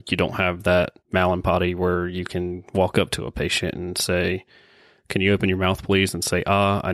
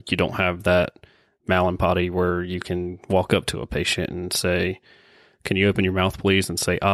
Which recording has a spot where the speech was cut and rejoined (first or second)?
first